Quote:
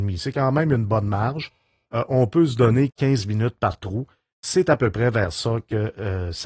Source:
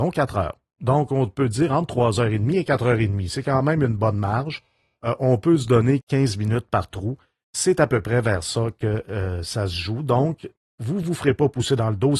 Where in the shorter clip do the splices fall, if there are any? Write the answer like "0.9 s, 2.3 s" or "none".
none